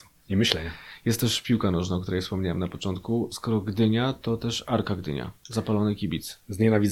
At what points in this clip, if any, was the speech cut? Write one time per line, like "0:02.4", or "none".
none

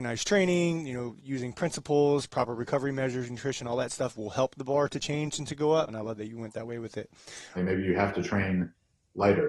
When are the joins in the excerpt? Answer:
0:05.9
0:07.6

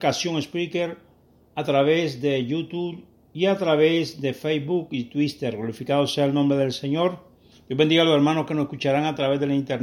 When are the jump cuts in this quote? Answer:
0:07.5

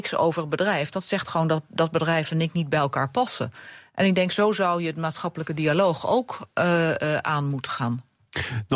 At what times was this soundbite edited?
none

